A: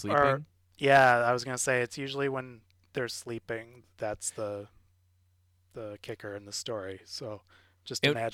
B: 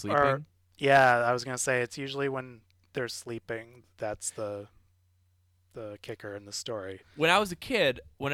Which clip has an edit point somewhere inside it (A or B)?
B